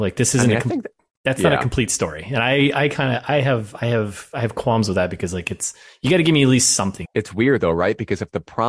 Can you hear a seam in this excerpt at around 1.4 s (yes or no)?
no